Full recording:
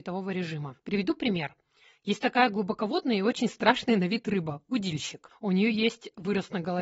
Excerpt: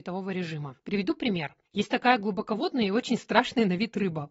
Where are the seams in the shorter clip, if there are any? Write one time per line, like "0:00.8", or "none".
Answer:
0:01.6